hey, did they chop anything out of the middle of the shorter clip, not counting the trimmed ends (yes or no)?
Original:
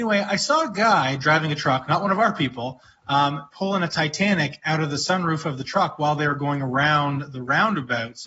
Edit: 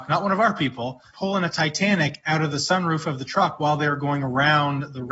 yes